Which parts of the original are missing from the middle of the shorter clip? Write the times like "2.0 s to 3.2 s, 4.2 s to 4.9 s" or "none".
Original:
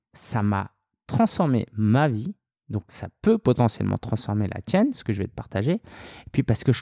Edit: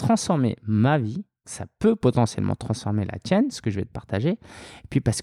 2.5 s to 2.9 s